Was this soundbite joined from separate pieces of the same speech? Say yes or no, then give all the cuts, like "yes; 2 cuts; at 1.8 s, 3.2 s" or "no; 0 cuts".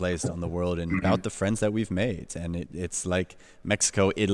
yes; 1 cut; at 1.0 s